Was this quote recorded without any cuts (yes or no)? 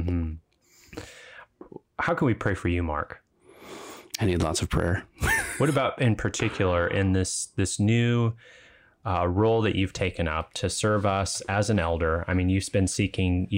yes